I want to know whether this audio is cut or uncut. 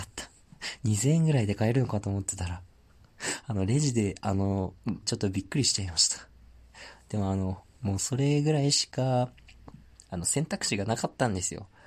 cut